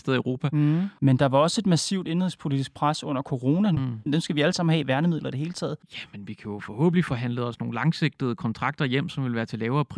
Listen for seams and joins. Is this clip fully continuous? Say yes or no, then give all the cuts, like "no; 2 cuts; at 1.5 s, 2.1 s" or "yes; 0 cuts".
no; 3 cuts; at 1.0 s, 4.1 s, 5.8 s